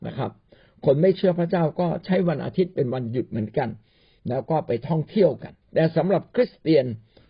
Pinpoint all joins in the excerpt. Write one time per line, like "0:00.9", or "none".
0:05.6